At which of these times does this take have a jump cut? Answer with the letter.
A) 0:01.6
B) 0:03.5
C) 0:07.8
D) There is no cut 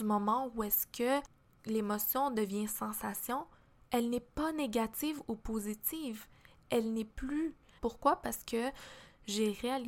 C